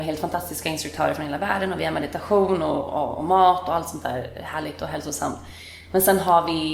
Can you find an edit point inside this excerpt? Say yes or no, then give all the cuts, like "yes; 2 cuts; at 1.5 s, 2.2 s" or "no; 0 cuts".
no; 0 cuts